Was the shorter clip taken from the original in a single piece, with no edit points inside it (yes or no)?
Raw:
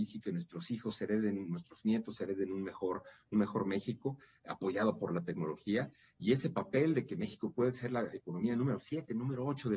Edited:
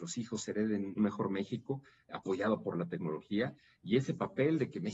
no